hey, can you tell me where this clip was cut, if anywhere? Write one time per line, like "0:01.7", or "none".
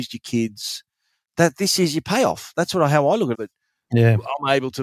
0:03.3